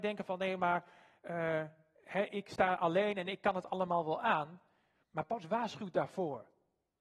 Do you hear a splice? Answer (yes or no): no